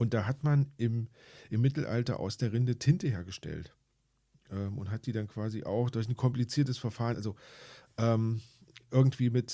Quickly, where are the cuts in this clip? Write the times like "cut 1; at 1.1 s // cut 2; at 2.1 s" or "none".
cut 1; at 7.1 s